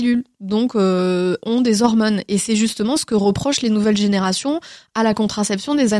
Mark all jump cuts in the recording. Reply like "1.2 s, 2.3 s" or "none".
none